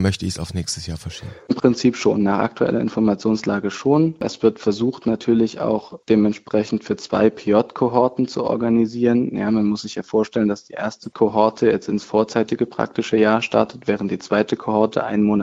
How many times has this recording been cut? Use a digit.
0